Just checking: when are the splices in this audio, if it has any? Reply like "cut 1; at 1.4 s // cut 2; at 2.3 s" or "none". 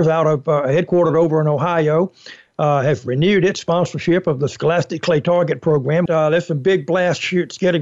cut 1; at 6.1 s